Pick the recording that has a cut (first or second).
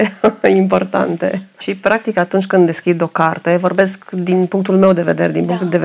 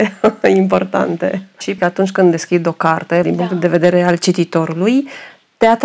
second